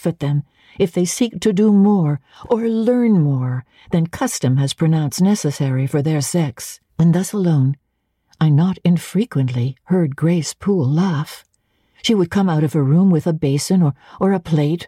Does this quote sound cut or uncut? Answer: cut